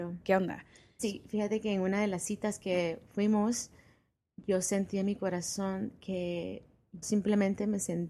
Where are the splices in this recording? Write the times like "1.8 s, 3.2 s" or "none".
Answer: 1.0 s, 7.0 s